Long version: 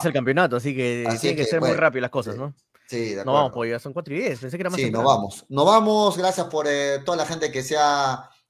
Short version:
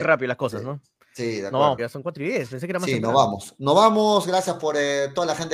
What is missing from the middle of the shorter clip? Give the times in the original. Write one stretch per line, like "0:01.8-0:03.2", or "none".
0:03.5-0:03.7